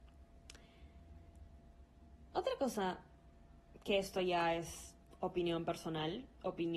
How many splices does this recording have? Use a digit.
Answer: 1